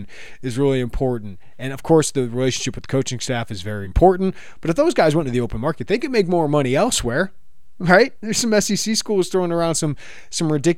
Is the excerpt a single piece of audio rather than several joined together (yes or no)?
no